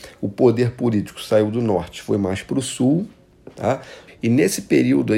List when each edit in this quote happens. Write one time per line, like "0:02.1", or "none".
0:04.1